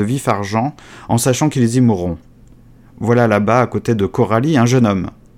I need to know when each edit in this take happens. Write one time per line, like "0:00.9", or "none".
none